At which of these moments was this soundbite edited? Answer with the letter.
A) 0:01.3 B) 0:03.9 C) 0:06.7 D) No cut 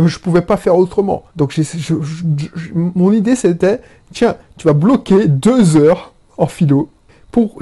A